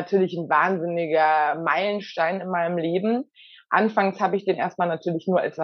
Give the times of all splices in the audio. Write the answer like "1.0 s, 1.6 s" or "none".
none